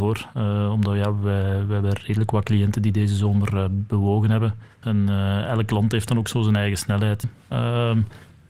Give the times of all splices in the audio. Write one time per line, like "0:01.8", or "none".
0:04.8
0:07.2